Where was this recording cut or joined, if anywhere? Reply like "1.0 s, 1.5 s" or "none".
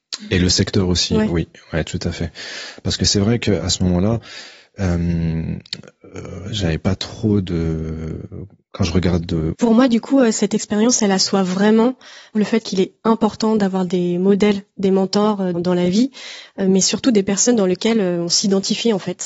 9.5 s, 12.3 s, 15.5 s